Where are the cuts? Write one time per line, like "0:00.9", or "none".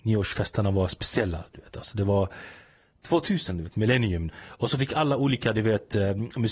0:04.3